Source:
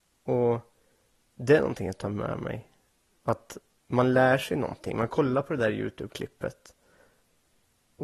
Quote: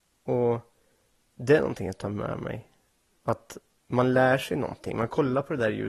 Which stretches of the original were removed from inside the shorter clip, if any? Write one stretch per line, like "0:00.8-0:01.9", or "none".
none